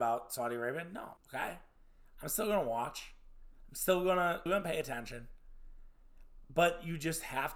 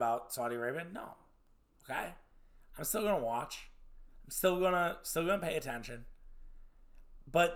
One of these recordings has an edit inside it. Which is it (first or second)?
first